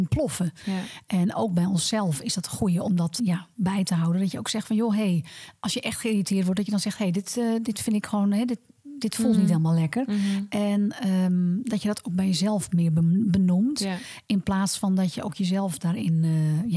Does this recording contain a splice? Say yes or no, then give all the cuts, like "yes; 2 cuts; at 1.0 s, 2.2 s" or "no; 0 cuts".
yes; 1 cut; at 3.2 s